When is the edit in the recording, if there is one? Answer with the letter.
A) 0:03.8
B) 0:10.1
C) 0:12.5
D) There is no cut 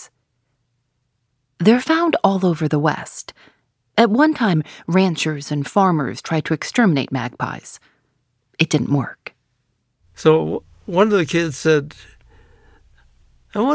D